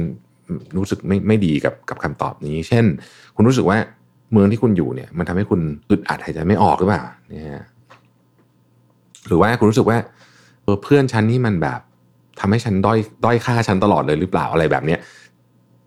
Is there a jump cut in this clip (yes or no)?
yes